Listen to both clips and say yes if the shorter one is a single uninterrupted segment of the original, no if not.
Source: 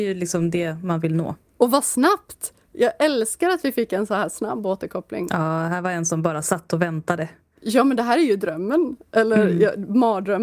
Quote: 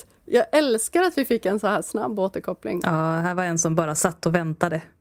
yes